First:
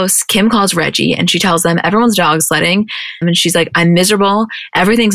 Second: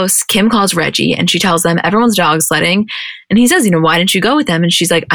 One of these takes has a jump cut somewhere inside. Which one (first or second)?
first